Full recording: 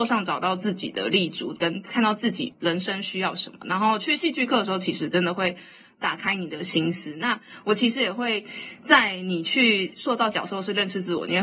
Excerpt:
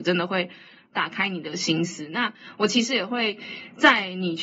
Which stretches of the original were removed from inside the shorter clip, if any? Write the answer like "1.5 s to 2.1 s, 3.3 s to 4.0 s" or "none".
none